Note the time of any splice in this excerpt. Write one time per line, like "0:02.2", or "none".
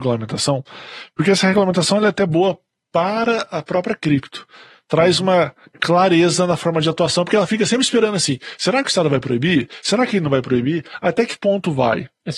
none